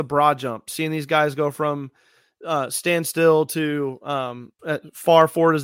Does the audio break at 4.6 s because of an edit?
yes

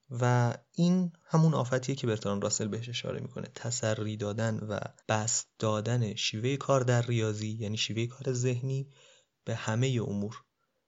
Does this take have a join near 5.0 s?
yes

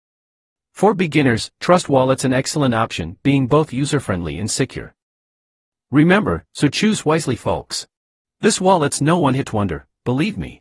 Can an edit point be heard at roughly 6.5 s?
yes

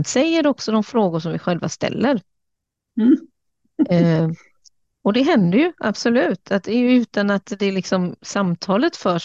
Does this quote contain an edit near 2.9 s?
yes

